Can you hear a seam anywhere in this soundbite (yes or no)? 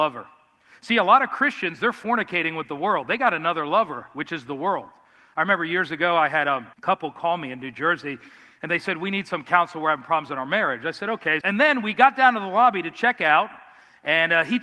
yes